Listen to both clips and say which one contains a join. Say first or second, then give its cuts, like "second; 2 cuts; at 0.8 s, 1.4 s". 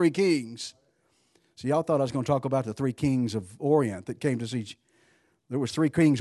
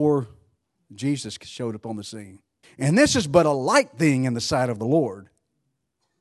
second; 1 cut; at 2.6 s